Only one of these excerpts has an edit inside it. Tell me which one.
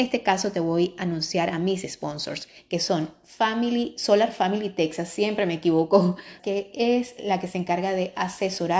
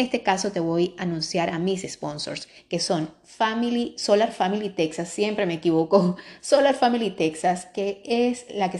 first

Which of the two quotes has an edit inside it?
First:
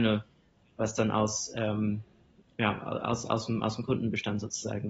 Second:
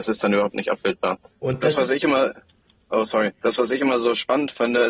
second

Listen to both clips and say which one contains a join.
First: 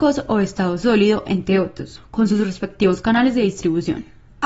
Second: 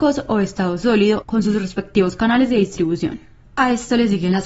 second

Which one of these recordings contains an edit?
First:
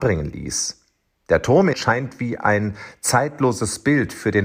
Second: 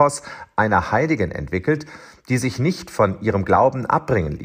first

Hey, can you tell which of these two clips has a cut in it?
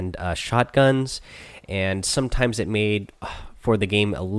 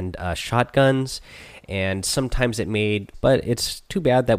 second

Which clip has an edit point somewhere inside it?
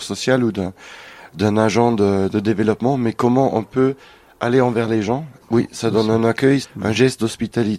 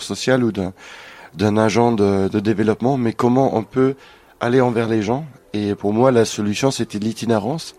first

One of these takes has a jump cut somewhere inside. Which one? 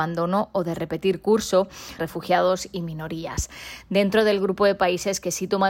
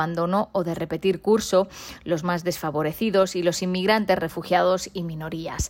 first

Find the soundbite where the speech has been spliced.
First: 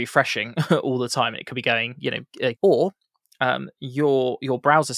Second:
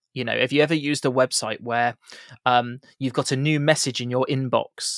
first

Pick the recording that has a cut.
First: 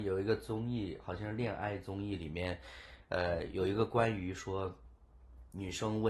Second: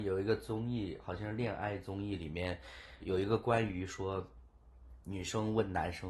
second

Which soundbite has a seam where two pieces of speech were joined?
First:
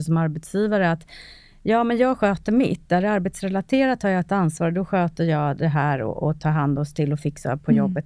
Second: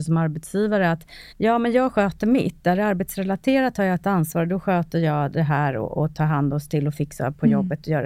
second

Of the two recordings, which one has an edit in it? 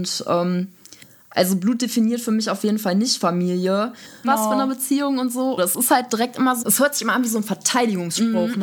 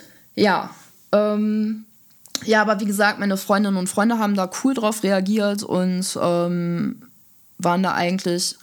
first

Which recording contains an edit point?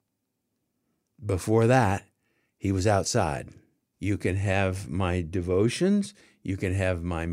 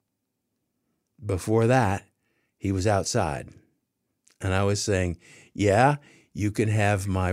first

